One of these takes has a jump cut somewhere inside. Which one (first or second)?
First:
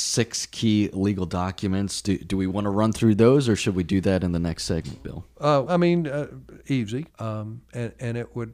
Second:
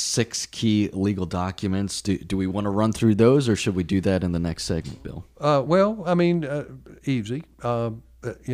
first